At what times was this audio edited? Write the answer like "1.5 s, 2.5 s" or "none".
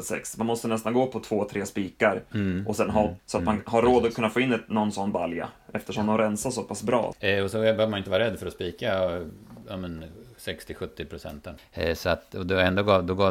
3.2 s, 7.1 s, 11.6 s